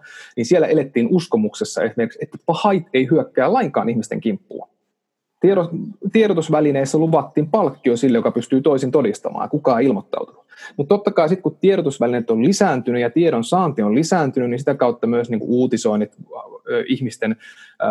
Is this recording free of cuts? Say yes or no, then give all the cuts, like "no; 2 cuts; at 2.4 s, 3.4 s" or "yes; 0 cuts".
yes; 0 cuts